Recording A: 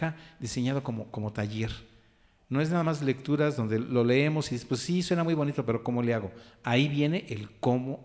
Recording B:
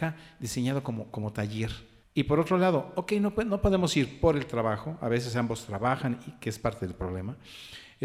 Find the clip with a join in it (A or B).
B